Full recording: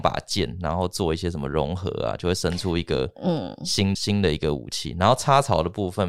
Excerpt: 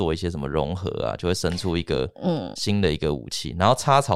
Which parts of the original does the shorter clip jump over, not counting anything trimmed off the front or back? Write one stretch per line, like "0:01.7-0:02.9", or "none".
0:03.6-0:04.0